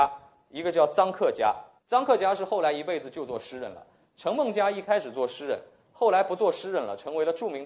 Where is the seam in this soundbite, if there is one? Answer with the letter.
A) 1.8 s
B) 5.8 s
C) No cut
A